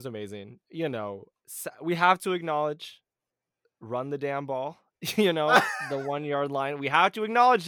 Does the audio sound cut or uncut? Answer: uncut